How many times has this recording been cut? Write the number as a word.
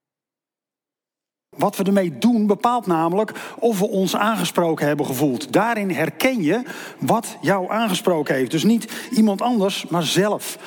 one